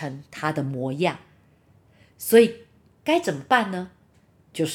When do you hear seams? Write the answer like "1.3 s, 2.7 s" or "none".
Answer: none